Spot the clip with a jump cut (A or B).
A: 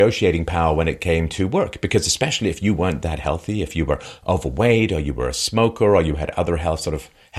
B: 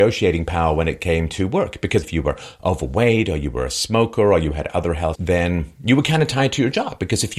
B